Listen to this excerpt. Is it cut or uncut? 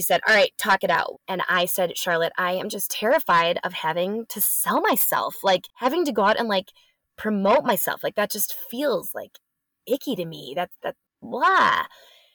cut